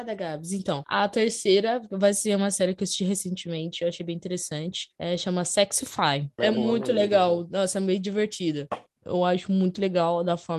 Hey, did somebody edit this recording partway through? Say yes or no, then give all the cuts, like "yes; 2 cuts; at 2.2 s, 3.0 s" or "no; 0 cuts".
yes; 2 cuts; at 6.4 s, 9.0 s